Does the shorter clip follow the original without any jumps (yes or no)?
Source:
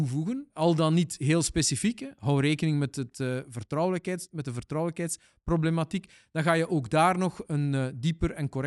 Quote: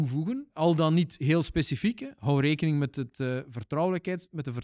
yes